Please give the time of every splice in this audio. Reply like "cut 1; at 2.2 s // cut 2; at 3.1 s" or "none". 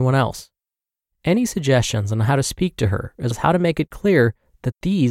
cut 1; at 3.3 s